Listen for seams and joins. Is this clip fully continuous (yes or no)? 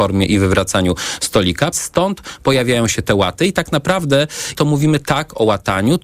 no